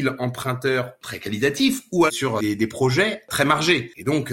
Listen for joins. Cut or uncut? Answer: cut